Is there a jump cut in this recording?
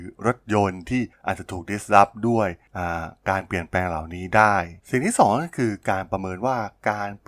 yes; 1 cut; at 4.8 s

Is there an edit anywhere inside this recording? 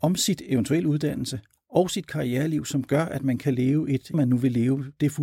yes; 1 cut; at 4.1 s

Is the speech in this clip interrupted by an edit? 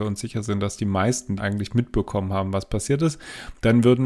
yes; 1 cut; at 1.4 s

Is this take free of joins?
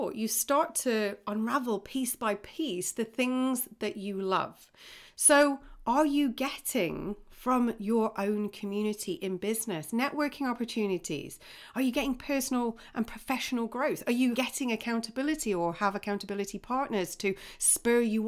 yes; 0 cuts

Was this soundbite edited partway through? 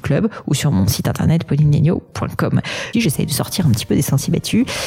yes; 1 cut; at 2.9 s

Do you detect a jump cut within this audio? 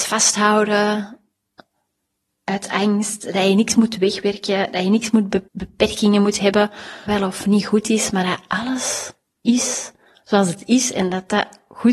yes; 2 cuts; at 5.5 s, 7.1 s

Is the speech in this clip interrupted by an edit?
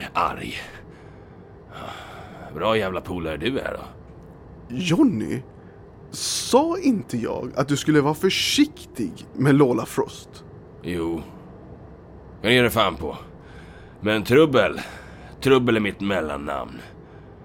no; 0 cuts

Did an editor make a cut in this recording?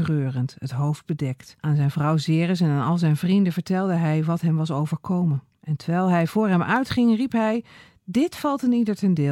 yes; 2 cuts; at 1.6 s, 5.5 s

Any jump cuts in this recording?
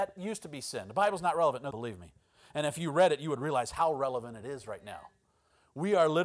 yes; 1 cut; at 1.7 s

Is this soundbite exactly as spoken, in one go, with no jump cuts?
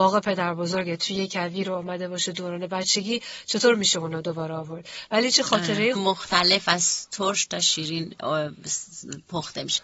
no; 1 cut; at 6.0 s

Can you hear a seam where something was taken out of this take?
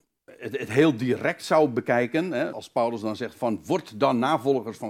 yes; 1 cut; at 2.5 s

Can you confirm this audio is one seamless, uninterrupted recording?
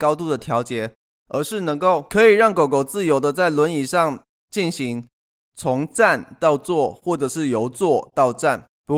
yes; 0 cuts

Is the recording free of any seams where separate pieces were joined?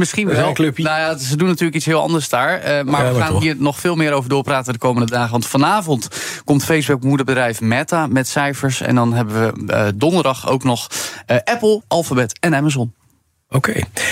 no; 1 cut; at 11.8 s

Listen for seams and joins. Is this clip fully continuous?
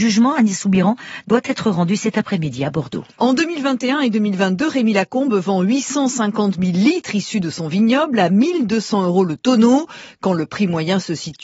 yes; 0 cuts

